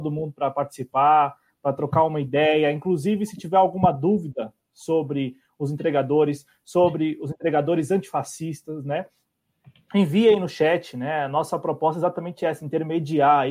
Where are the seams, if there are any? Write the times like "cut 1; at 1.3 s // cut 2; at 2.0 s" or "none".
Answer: none